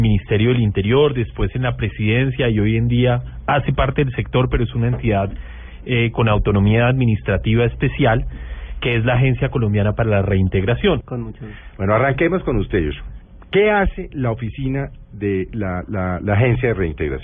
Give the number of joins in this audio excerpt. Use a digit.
1